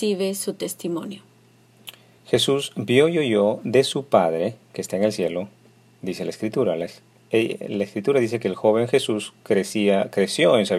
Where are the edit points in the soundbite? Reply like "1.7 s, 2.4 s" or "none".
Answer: none